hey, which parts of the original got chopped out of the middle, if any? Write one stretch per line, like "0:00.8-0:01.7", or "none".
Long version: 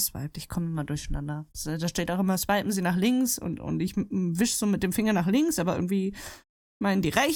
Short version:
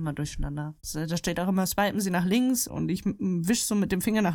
0:03.4-0:03.6